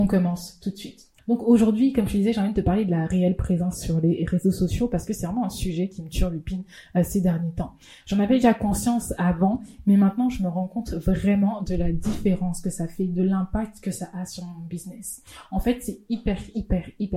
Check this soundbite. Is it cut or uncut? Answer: cut